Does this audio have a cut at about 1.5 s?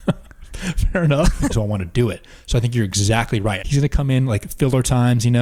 yes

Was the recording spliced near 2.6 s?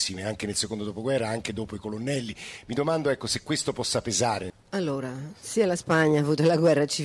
no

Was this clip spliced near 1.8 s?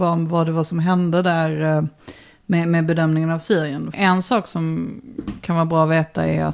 no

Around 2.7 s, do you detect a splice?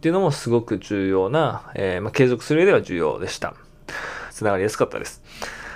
no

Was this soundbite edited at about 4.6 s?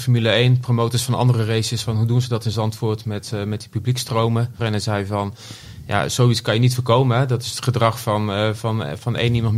yes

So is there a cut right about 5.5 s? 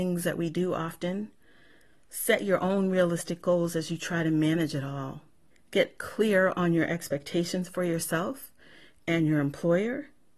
yes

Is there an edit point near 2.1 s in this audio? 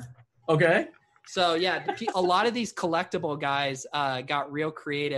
yes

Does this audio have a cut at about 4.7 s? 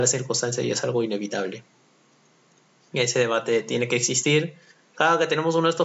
yes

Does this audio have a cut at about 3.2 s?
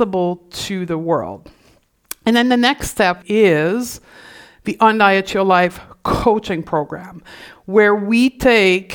yes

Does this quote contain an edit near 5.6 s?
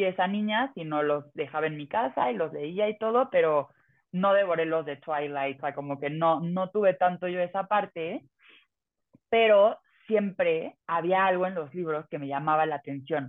yes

